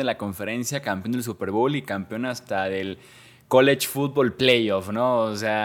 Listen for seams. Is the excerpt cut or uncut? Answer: uncut